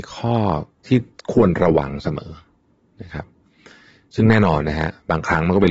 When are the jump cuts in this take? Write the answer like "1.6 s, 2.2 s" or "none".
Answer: none